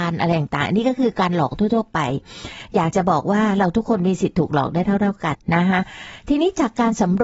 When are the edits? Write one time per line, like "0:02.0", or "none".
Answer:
0:05.3